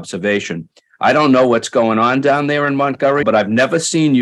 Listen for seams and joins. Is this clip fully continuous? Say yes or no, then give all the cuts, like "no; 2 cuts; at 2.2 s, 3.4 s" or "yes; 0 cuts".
no; 2 cuts; at 0.9 s, 3.2 s